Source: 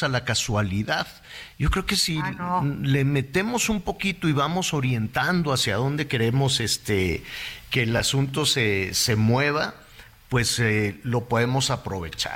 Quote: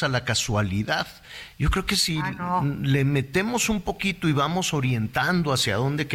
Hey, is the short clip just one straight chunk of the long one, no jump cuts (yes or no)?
yes